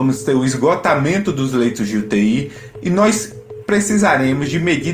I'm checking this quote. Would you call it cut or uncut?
uncut